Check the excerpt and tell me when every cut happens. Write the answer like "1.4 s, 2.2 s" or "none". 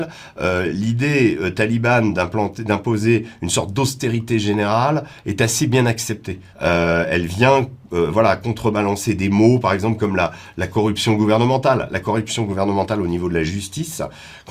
6.5 s